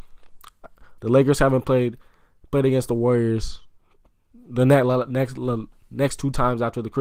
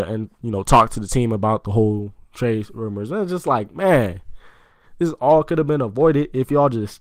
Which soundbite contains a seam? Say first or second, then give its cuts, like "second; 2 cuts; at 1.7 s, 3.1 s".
first; 1 cut; at 1.0 s